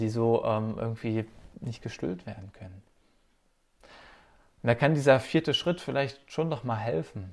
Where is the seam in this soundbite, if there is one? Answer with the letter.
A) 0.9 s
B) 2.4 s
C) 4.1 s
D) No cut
D